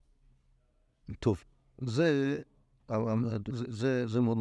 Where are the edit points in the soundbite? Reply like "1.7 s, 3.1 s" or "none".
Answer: 3.5 s